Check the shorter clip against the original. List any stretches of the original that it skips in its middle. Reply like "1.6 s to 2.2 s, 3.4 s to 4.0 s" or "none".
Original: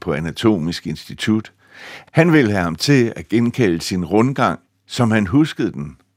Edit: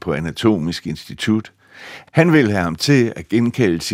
none